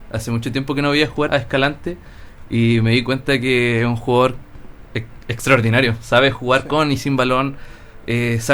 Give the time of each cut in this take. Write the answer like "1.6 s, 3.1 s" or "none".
1.3 s